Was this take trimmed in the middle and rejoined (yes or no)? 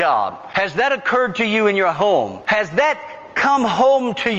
no